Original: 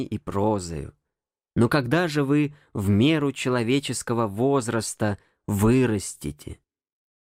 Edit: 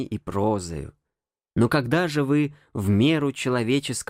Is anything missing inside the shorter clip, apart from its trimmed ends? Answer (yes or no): no